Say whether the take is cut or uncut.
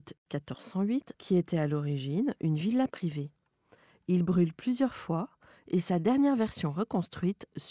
cut